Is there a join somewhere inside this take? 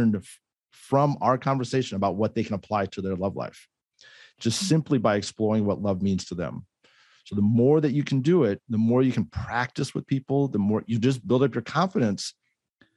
no; 0 cuts

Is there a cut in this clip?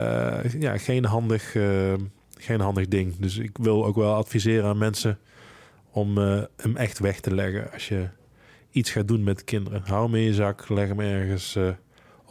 no; 0 cuts

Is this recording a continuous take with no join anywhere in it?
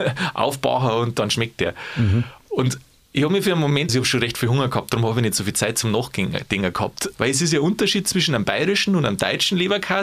no; 2 cuts; at 3.9 s, 7.1 s

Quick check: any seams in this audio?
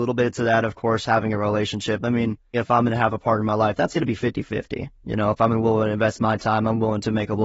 yes; 1 cut; at 2.5 s

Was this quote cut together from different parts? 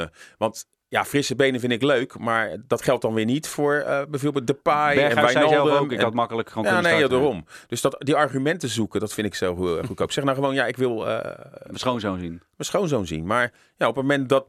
no; 0 cuts

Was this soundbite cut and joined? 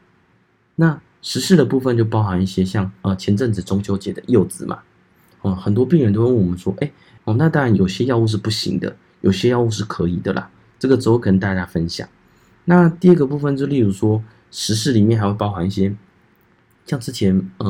yes; 1 cut; at 7.2 s

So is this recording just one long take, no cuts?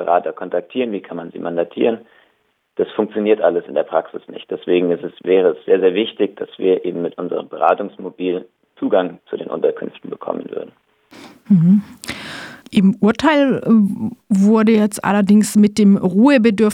no; 1 cut; at 12.6 s

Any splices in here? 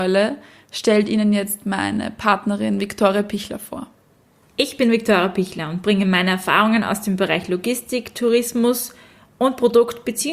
yes; 1 cut; at 4.5 s

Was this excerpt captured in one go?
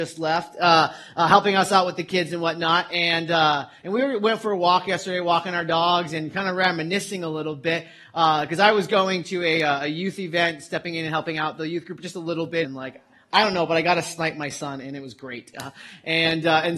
no; 2 cuts; at 12.6 s, 15.5 s

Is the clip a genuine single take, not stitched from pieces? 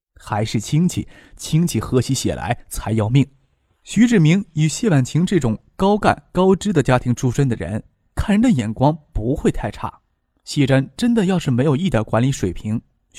yes; 0 cuts

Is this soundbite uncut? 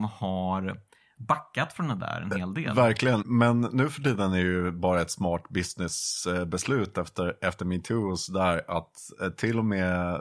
no; 1 cut; at 3.2 s

